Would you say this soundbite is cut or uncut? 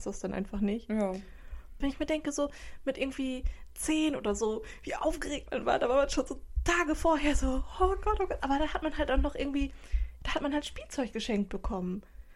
cut